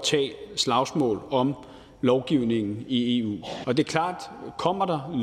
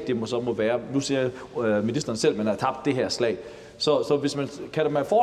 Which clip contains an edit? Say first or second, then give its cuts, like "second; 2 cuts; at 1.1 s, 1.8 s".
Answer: first; 1 cut; at 3.6 s